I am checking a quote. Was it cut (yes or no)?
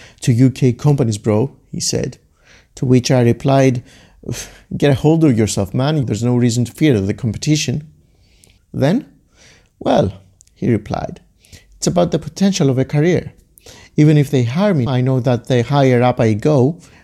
yes